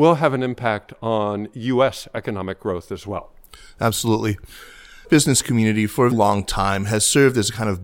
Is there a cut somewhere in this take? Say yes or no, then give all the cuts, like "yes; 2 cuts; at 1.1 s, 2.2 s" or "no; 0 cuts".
yes; 2 cuts; at 5.0 s, 6.1 s